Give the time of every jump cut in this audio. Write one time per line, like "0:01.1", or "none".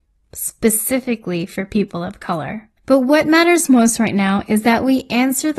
0:02.8